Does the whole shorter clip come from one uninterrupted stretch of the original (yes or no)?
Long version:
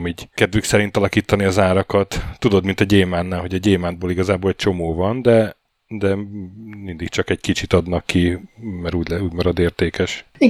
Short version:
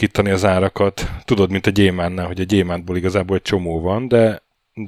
yes